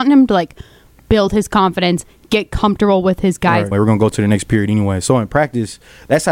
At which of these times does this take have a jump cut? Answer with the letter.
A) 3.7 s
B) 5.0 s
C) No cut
A